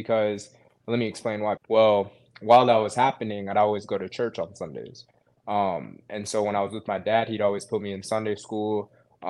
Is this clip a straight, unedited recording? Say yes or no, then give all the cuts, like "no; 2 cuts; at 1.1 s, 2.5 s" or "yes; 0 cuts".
no; 1 cut; at 1.6 s